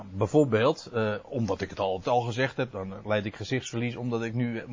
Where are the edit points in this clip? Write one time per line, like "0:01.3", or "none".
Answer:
none